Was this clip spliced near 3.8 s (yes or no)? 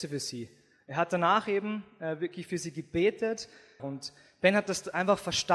yes